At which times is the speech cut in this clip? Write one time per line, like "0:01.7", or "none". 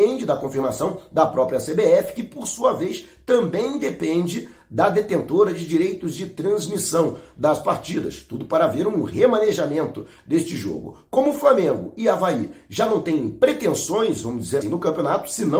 0:14.6